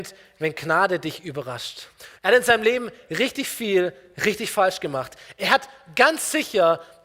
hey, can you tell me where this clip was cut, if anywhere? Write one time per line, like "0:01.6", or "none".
0:02.2